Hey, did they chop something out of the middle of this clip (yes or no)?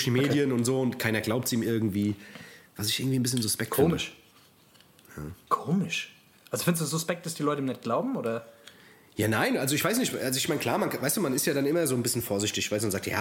no